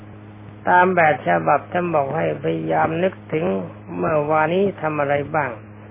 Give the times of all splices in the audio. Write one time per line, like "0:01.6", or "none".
0:04.5